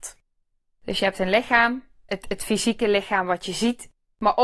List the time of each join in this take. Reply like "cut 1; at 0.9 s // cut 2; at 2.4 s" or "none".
cut 1; at 2.1 s